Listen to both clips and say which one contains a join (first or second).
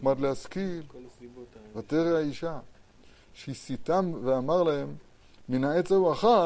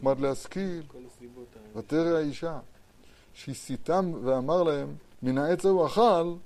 second